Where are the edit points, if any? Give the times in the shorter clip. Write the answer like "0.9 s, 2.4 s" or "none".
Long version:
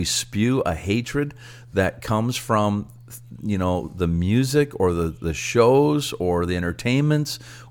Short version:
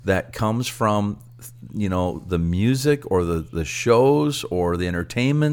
none